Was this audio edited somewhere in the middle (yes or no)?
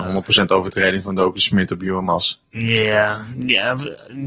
no